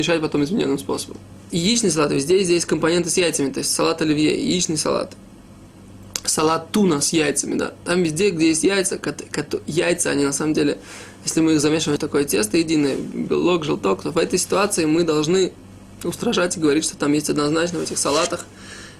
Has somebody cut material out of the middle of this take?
yes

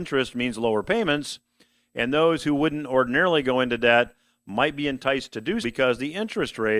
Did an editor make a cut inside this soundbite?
yes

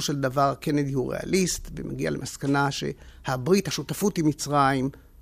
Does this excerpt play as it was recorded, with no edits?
yes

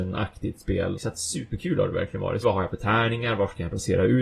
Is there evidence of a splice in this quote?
yes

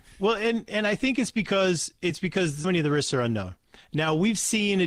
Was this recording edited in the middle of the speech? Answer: yes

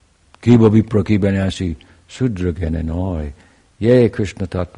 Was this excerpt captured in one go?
yes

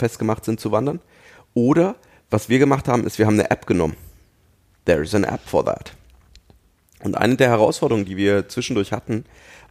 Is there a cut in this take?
no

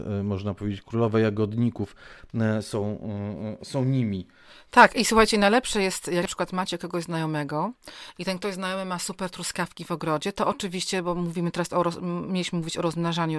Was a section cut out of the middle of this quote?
no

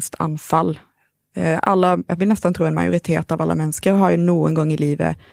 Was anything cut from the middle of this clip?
yes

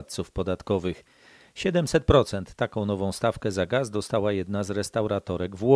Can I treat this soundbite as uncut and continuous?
yes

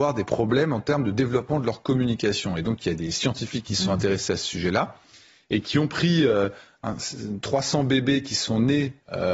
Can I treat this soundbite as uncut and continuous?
yes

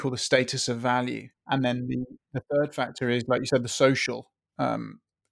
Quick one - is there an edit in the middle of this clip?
yes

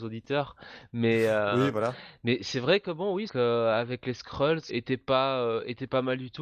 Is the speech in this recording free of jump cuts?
no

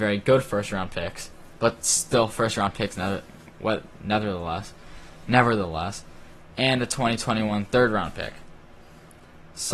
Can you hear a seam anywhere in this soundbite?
no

